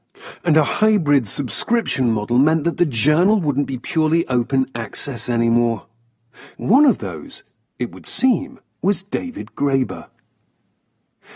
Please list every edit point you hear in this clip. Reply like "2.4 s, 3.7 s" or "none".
6.5 s, 8.7 s